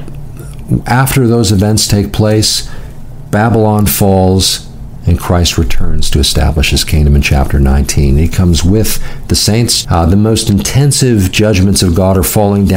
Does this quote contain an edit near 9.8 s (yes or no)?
yes